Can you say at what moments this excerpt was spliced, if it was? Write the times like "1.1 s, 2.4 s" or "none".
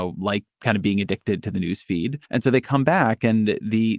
2.3 s